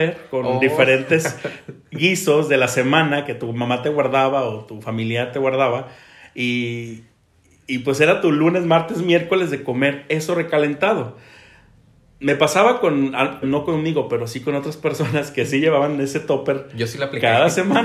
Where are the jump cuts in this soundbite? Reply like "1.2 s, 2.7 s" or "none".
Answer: 13.4 s